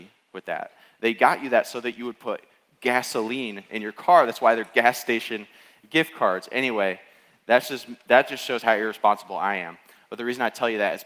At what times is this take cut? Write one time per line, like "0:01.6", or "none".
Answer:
none